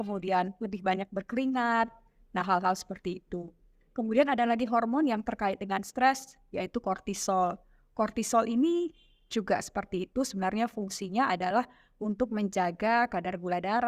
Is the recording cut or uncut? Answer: uncut